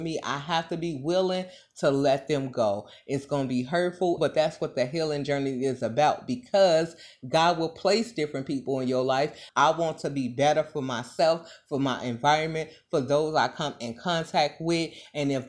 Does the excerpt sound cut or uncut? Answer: cut